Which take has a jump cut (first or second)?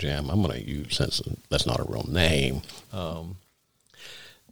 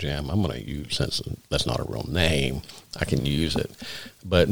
first